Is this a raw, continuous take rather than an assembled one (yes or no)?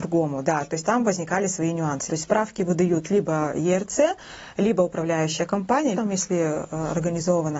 no